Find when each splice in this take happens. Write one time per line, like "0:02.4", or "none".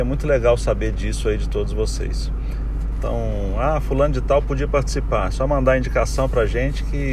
0:02.9